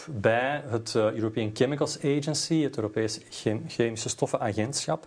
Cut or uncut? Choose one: uncut